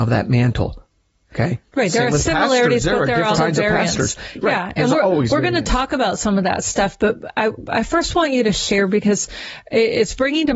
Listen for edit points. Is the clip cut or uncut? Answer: cut